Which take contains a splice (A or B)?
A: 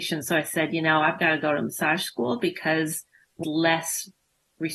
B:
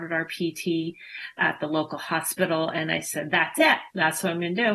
A